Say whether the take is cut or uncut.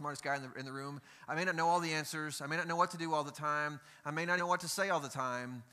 cut